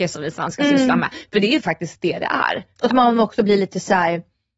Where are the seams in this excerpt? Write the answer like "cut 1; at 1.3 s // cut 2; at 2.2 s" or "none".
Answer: none

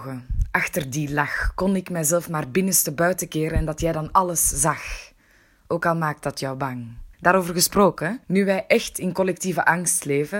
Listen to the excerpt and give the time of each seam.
cut 1; at 7.1 s // cut 2; at 8.2 s

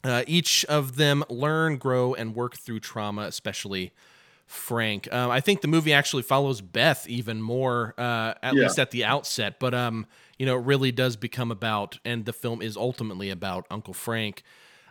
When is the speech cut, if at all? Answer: none

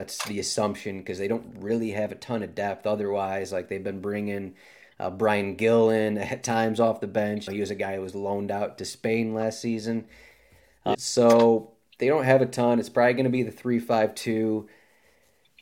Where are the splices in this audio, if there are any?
cut 1; at 7.5 s // cut 2; at 10.9 s

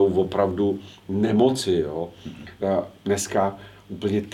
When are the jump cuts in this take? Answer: none

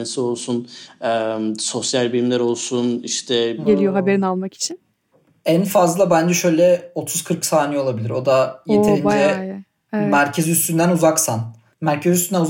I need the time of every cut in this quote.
cut 1; at 3.7 s

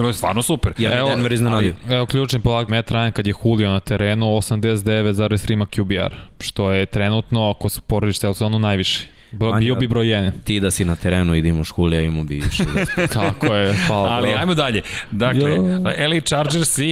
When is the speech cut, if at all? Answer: cut 1; at 2.7 s

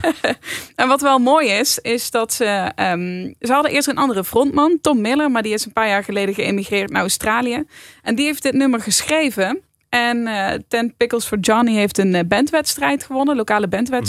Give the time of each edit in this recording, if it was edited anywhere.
none

